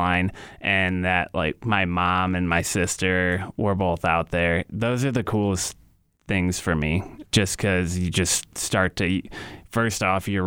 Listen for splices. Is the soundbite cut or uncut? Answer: uncut